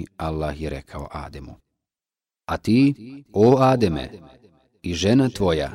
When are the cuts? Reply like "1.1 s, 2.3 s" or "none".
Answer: none